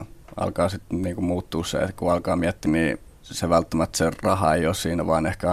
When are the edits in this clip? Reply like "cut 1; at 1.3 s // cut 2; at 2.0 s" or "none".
cut 1; at 2.7 s